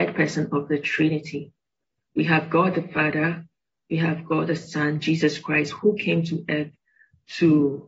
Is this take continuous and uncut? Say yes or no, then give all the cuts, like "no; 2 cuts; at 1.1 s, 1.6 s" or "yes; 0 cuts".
yes; 0 cuts